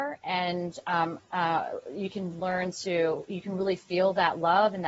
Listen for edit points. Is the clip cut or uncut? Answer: cut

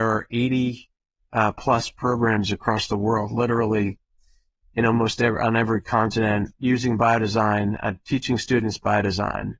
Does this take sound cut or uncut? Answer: uncut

